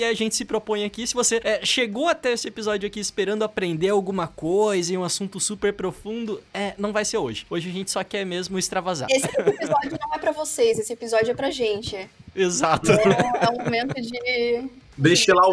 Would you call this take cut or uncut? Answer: uncut